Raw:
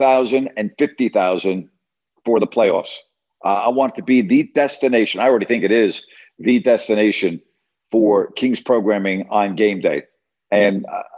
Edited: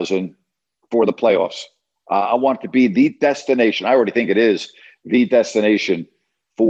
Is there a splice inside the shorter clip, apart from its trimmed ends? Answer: no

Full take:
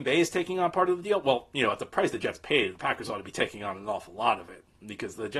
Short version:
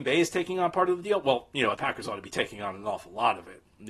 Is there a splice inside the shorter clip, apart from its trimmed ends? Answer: yes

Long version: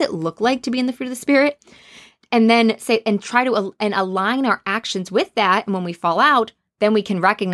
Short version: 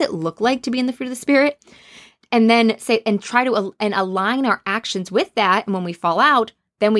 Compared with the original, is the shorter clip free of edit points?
yes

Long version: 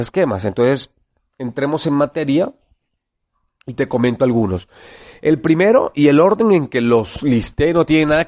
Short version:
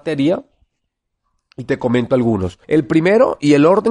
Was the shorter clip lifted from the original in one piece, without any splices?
no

